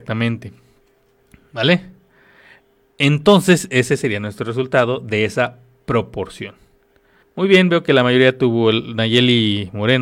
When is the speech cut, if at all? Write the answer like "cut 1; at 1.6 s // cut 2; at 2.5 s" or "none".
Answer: cut 1; at 7.2 s